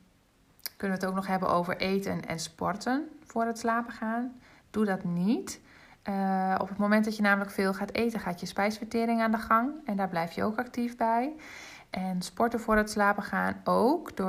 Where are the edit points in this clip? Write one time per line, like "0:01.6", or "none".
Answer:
none